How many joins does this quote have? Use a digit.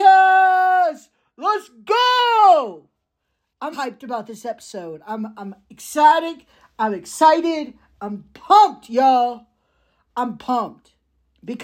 1